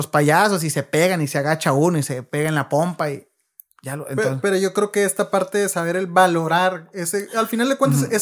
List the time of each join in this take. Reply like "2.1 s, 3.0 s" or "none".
none